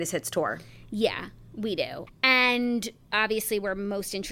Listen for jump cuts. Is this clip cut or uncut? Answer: cut